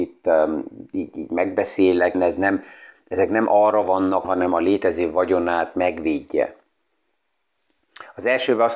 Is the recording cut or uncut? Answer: cut